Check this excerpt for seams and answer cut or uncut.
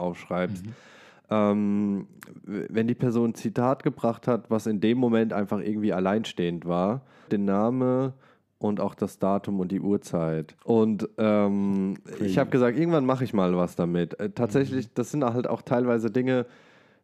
cut